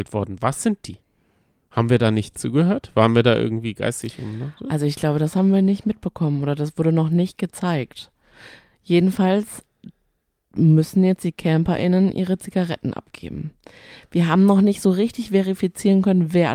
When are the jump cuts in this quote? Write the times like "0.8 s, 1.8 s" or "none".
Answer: none

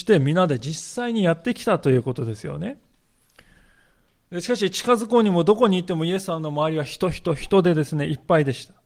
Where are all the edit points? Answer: none

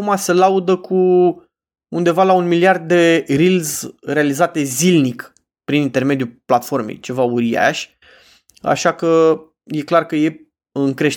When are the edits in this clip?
none

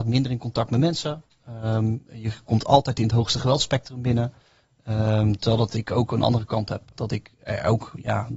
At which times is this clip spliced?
6.9 s

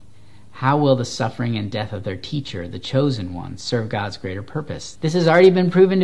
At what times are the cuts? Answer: 4.9 s

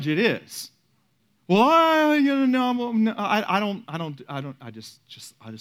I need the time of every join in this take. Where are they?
none

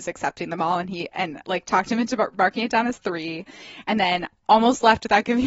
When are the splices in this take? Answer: none

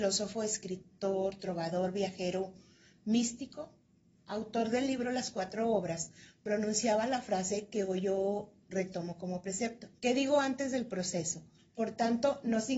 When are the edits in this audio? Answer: 10.0 s, 11.6 s

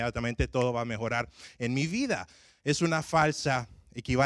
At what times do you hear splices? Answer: none

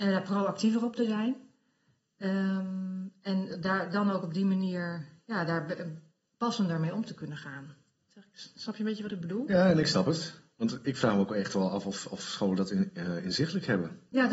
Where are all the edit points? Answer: none

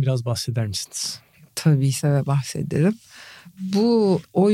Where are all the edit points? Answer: 1.9 s

